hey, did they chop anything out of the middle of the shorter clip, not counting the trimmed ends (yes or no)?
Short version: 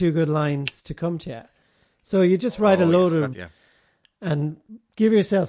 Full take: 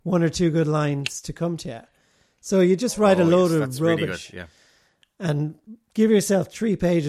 yes